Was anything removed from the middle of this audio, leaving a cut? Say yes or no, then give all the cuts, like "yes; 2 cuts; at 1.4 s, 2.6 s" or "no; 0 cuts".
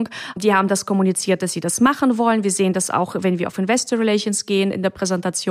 no; 0 cuts